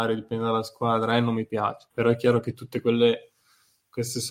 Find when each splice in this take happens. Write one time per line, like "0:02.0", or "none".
0:01.9